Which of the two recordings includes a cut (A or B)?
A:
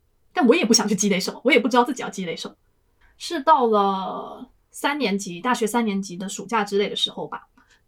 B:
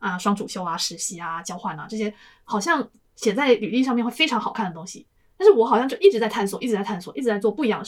A